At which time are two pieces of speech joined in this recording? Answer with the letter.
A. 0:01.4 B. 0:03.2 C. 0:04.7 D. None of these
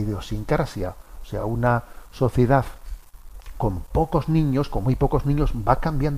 D